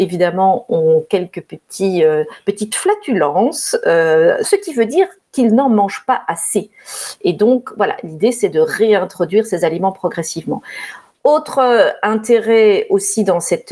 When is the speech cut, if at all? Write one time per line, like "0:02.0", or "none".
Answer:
0:04.4